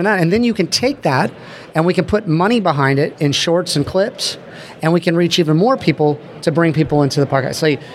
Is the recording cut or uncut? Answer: uncut